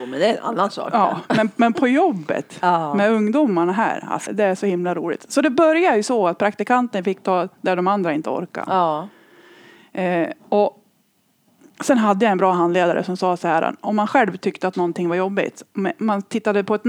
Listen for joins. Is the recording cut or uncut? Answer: cut